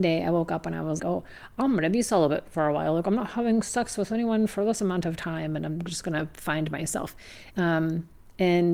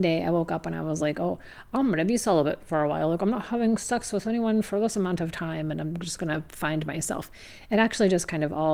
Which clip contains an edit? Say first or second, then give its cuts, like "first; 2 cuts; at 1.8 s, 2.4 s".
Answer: first; 2 cuts; at 1.0 s, 7.5 s